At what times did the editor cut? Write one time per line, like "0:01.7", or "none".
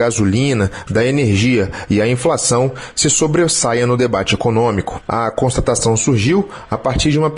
0:05.1

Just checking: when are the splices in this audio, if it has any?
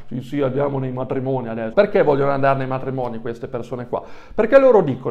0:01.7

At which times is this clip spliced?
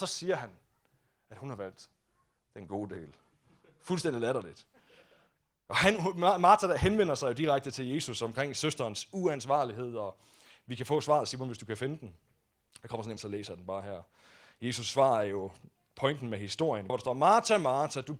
0:13.2
0:16.9

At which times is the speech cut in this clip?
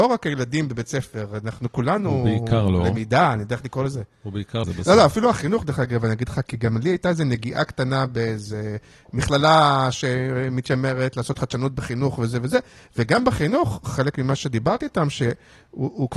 0:04.6

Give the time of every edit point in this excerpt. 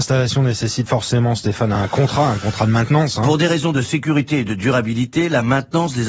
0:01.7

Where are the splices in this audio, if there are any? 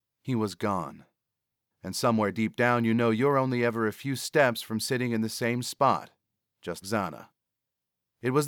0:01.7
0:06.8

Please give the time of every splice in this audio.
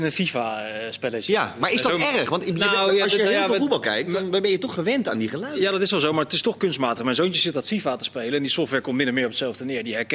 none

